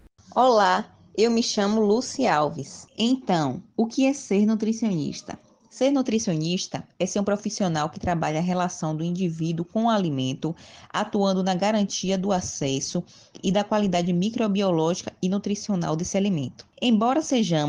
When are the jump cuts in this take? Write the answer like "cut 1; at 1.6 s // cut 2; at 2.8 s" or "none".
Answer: none